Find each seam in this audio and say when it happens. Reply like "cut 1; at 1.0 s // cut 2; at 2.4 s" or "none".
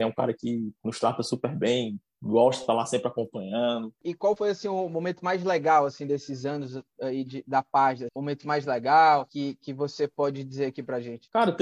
cut 1; at 4.0 s // cut 2; at 8.1 s